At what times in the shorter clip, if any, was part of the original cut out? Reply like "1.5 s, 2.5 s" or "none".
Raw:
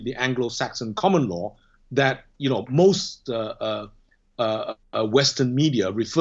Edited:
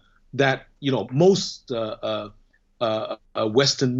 none